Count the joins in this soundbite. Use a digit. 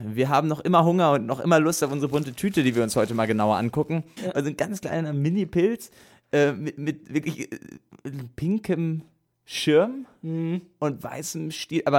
1